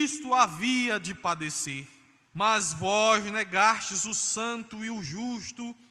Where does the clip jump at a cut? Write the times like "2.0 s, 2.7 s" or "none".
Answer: 2.2 s